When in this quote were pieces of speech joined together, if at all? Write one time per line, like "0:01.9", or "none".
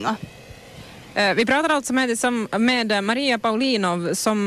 none